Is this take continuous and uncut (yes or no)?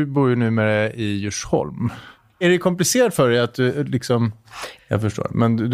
no